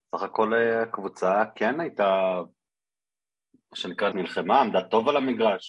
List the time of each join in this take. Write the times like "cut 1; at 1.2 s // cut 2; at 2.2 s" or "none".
cut 1; at 4.1 s